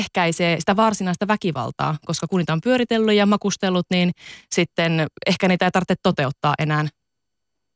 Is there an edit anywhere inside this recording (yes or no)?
no